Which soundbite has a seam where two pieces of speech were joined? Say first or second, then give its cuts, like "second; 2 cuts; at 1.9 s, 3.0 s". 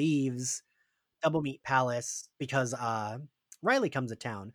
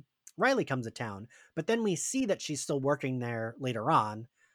first; 1 cut; at 2.3 s